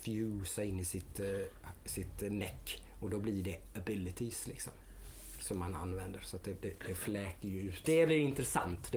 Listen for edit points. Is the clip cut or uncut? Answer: cut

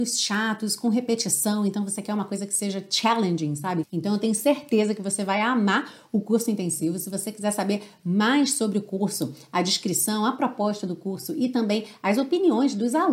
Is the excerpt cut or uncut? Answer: cut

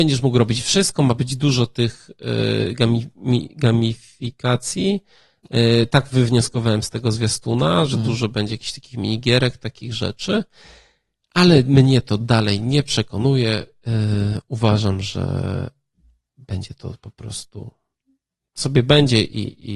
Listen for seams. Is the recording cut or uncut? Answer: uncut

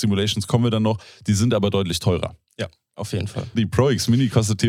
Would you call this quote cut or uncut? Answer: cut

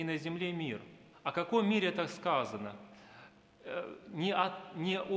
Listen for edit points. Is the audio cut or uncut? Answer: cut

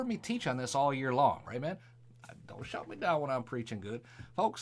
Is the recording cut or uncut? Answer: cut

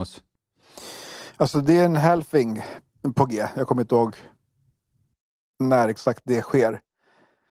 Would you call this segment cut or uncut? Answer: uncut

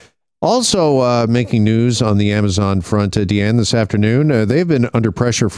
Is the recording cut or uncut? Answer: uncut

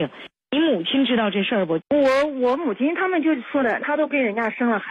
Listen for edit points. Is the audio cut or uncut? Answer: cut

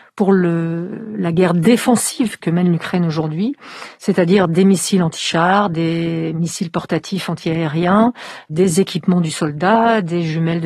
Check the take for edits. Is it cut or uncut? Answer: uncut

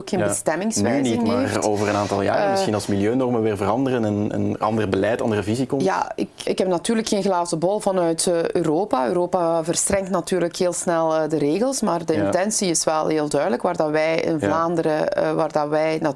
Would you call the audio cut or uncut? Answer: cut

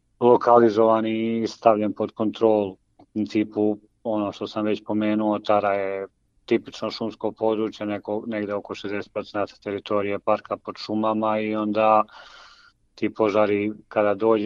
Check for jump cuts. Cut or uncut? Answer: uncut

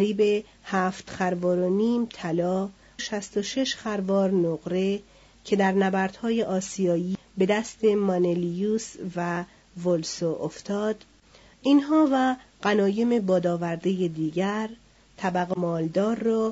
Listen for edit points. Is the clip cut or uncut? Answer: cut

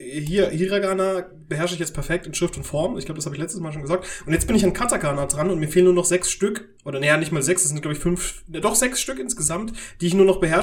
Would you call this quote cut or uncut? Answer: cut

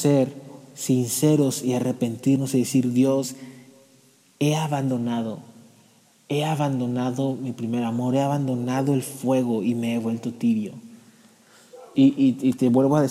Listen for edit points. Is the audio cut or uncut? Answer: cut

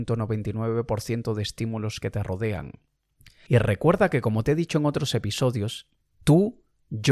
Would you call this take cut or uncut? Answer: cut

